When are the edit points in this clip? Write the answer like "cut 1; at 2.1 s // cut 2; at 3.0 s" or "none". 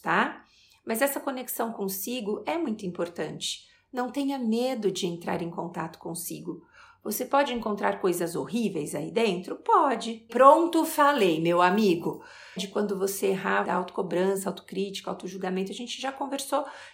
cut 1; at 10.3 s // cut 2; at 12.6 s // cut 3; at 13.6 s